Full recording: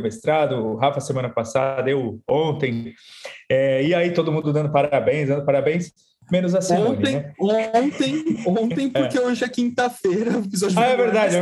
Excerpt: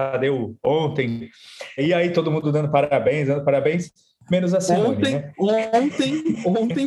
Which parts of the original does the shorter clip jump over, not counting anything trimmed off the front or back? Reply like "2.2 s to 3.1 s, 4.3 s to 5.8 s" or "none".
3.4 s to 3.8 s